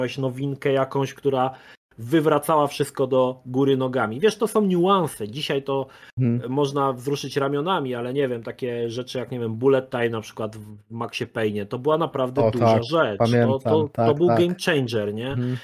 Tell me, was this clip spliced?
no; 0 cuts

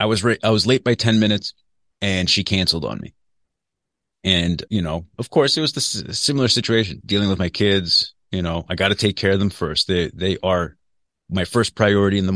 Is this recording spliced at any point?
yes; 2 cuts; at 4.7 s, 7.0 s

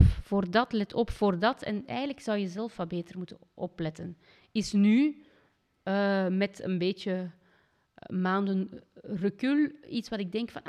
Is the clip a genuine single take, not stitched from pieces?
yes; 0 cuts

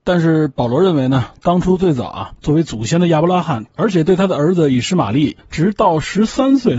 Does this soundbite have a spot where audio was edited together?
yes; 1 cut; at 3.7 s

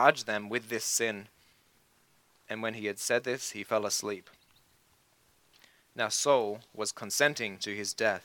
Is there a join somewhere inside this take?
no; 0 cuts

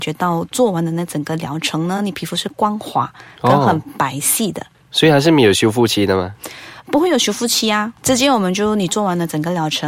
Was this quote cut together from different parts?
no; 0 cuts

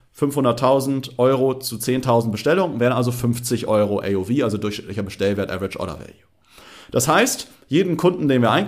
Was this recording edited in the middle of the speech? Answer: no; 0 cuts

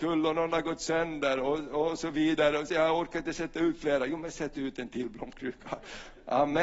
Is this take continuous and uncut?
yes; 0 cuts

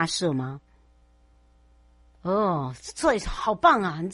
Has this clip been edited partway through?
no; 0 cuts

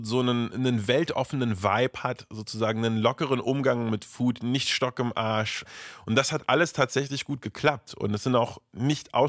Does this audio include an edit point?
no; 0 cuts

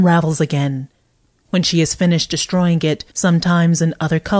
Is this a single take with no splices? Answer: no; 1 cut; at 3.1 s

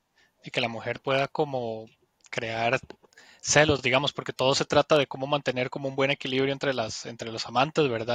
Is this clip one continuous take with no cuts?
yes; 0 cuts

